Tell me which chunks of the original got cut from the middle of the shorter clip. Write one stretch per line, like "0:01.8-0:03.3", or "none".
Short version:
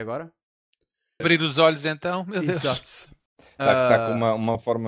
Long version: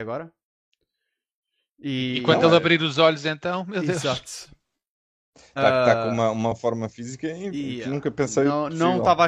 0:01.2-0:02.6
0:04.7-0:05.2